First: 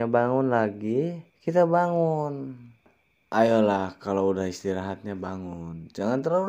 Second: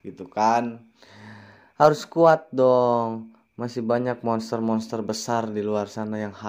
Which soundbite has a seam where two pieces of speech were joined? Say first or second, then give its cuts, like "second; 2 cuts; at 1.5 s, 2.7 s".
first; 1 cut; at 1.3 s